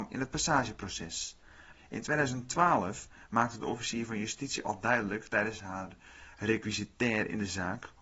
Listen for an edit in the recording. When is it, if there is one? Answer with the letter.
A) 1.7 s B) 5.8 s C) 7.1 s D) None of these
A